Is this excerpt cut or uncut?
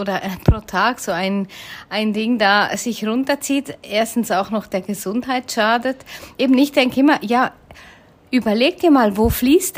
uncut